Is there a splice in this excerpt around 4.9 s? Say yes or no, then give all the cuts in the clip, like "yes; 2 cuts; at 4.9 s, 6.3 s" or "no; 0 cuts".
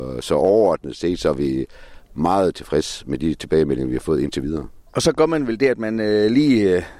yes; 1 cut; at 4.9 s